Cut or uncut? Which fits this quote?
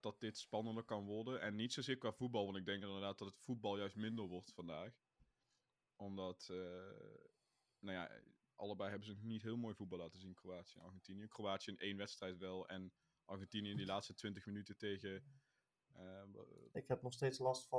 cut